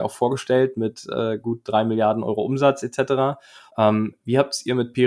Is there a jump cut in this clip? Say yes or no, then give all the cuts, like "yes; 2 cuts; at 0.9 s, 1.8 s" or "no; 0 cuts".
yes; 1 cut; at 3.7 s